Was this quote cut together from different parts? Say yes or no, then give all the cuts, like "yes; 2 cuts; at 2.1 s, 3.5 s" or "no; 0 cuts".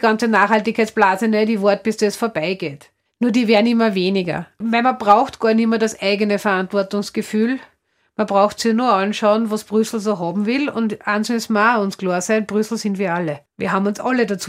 no; 0 cuts